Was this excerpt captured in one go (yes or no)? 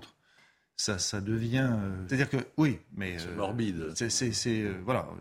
no